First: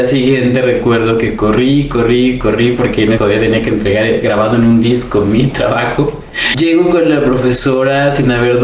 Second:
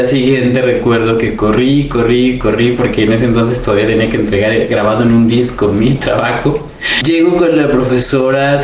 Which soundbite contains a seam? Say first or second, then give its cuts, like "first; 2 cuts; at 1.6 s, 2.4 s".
first; 1 cut; at 3.2 s